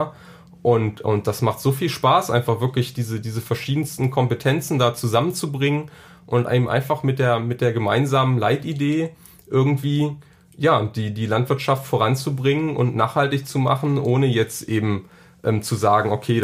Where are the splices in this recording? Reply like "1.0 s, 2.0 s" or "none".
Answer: none